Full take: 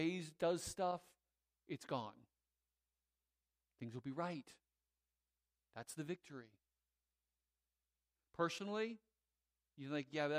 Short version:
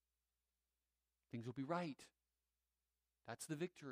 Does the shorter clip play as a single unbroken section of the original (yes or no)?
yes